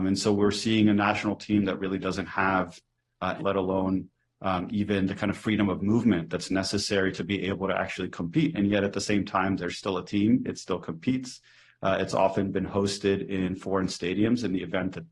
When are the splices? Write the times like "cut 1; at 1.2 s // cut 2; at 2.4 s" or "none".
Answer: cut 1; at 3.4 s

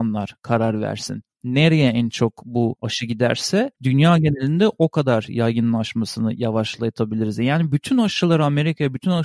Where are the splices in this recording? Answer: none

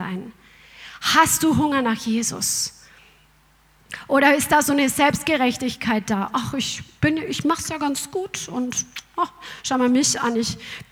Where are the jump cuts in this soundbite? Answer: none

